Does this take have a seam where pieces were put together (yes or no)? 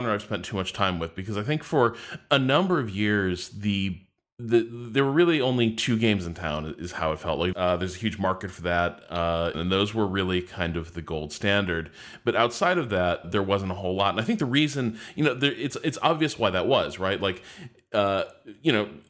yes